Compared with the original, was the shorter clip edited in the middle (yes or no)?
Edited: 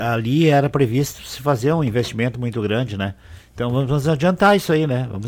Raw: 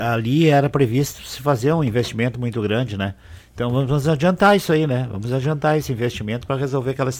no